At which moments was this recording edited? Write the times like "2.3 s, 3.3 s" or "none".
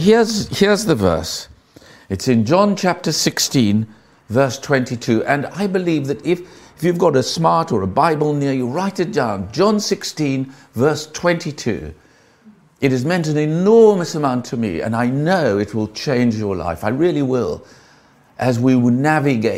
none